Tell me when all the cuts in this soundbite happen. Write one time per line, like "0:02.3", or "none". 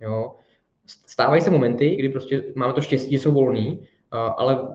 0:02.0